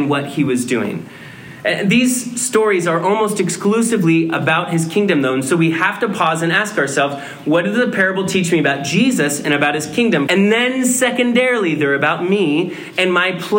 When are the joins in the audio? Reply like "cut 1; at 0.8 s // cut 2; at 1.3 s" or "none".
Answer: cut 1; at 10.3 s